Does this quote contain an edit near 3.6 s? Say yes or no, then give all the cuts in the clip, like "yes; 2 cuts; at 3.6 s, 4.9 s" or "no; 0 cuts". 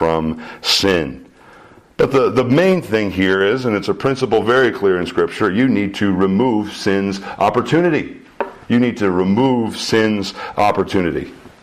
no; 0 cuts